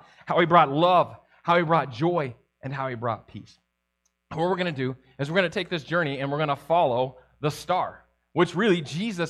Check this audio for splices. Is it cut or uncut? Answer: uncut